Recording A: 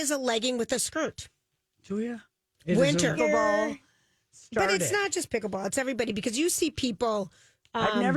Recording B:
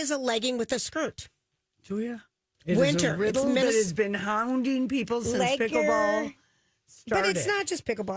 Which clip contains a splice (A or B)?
A